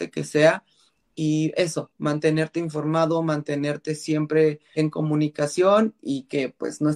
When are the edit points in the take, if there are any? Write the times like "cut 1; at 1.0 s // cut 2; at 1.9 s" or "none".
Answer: cut 1; at 4.8 s